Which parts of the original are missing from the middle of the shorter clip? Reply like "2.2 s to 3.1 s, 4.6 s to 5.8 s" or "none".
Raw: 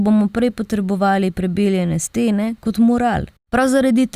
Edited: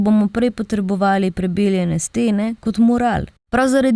none